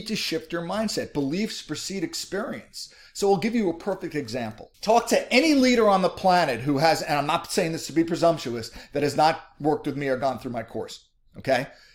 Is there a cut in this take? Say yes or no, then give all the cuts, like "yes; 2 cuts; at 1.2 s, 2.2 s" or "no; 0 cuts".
yes; 1 cut; at 4.7 s